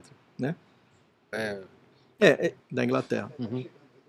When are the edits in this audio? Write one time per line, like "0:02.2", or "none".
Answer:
0:01.3
0:02.6